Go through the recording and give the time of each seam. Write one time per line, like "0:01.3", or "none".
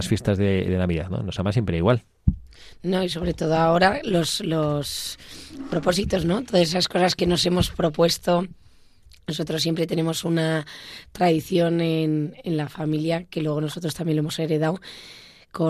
none